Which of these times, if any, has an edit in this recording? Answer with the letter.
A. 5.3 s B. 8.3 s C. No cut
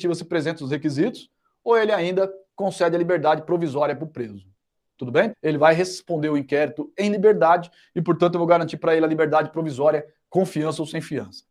A